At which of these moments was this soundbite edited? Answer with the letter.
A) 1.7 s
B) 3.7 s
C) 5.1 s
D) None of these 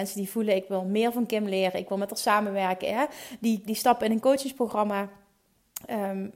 B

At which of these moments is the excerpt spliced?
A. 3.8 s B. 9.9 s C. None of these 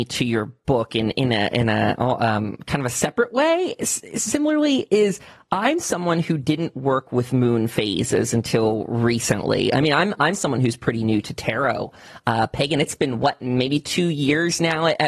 C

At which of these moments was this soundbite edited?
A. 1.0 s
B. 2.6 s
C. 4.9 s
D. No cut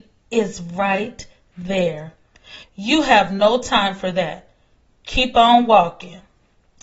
B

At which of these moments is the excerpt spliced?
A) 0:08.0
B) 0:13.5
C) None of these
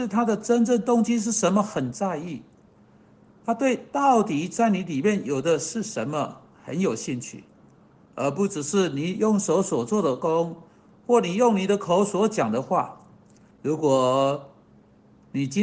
B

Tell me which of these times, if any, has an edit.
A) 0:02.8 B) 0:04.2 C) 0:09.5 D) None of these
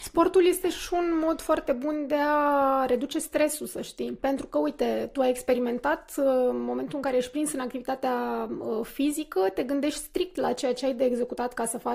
B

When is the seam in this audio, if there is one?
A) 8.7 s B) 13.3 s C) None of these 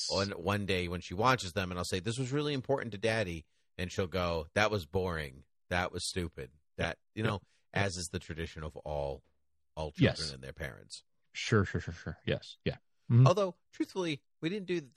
C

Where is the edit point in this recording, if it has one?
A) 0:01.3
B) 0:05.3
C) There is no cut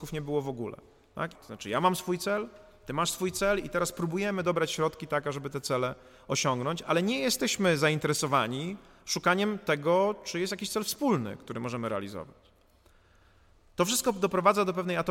A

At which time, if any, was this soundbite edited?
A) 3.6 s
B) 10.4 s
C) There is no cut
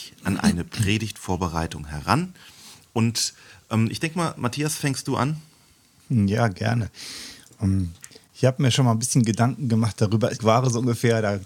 B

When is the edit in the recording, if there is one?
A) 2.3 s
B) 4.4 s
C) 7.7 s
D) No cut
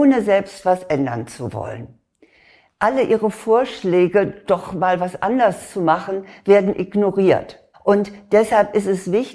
C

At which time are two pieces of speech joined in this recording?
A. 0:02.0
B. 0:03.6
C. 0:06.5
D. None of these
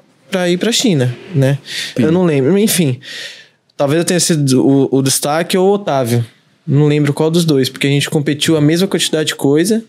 A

